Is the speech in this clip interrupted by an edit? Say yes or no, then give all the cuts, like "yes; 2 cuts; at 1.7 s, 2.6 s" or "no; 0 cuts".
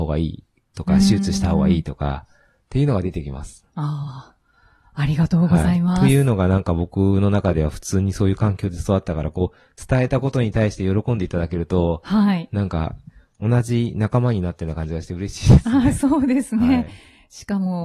no; 0 cuts